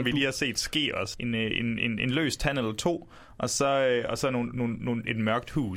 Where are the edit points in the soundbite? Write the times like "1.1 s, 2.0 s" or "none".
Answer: 1.1 s